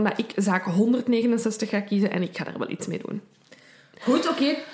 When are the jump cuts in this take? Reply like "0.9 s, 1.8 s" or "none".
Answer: none